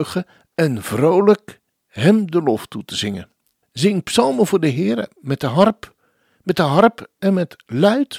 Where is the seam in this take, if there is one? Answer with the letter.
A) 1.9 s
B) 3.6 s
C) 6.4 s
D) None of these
B